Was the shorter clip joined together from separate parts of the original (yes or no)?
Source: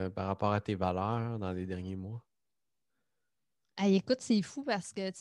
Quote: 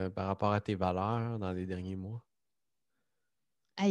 no